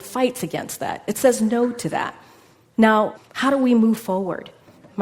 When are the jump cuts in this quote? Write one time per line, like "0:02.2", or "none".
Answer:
none